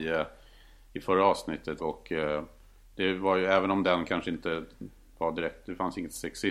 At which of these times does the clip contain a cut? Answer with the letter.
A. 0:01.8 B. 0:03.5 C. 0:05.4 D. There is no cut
A